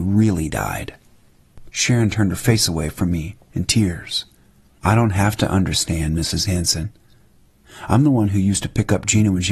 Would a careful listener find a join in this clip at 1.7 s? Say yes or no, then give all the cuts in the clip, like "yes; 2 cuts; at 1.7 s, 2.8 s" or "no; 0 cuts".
yes; 2 cuts; at 1.7 s, 4.7 s